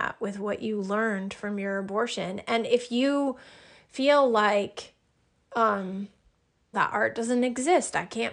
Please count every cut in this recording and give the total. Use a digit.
1